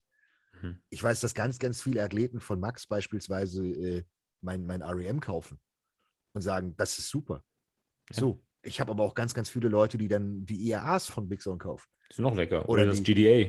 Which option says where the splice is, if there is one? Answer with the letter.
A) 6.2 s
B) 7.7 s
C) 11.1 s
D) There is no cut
C